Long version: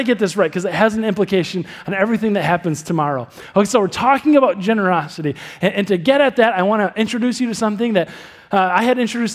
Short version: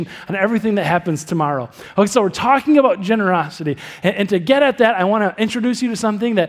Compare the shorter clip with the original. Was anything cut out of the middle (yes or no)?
no